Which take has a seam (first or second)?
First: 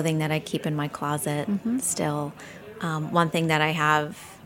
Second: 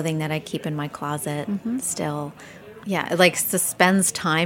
second